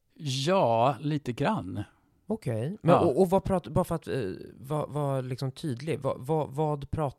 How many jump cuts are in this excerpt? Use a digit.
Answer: 0